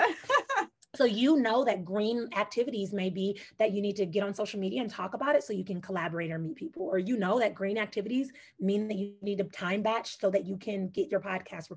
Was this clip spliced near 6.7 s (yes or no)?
no